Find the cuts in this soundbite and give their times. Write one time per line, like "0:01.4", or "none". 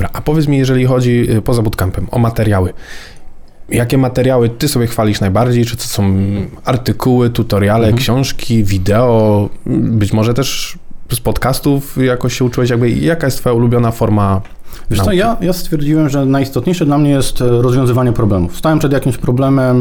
none